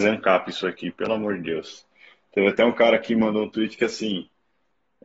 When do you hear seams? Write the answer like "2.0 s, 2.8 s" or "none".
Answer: none

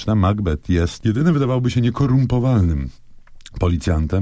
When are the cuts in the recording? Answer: none

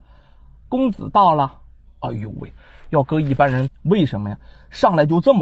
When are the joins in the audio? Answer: 1.9 s, 3.7 s

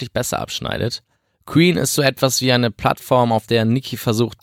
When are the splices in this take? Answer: none

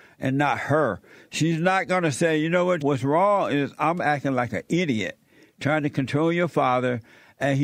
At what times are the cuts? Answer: 2.8 s

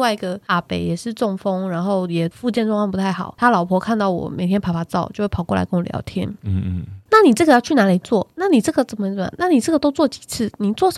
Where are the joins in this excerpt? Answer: none

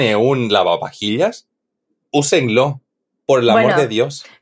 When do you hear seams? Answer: none

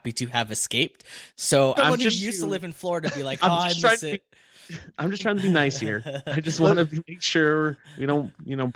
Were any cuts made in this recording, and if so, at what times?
1.8 s

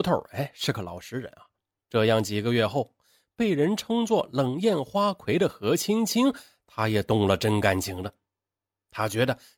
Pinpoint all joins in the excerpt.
1.9 s

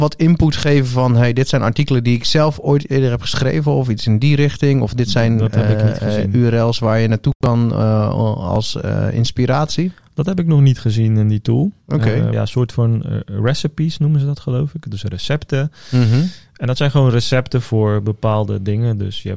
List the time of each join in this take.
12.3 s

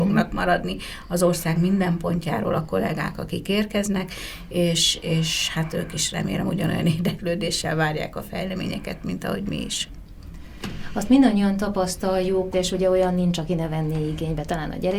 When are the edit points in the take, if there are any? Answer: 12.5 s

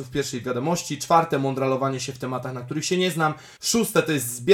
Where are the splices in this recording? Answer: 3.6 s

